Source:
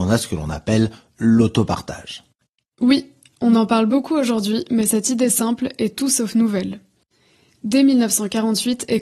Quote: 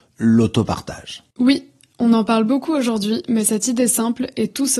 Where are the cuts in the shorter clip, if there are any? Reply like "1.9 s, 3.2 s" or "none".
1.3 s